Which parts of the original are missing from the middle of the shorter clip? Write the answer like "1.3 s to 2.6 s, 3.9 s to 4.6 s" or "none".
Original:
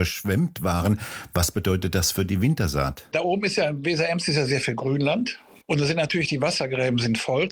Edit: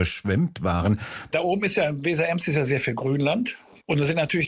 1.3 s to 3.1 s